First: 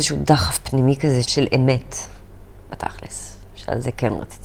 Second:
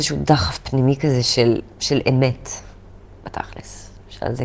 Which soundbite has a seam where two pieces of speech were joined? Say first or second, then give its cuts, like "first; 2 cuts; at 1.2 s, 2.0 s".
first; 1 cut; at 1.2 s